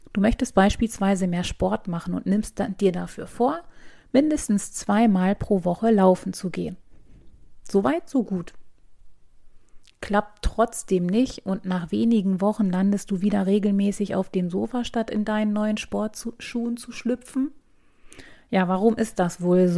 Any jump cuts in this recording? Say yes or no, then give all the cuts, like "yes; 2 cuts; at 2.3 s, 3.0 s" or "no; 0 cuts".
no; 0 cuts